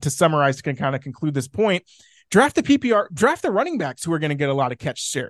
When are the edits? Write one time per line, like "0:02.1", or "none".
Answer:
none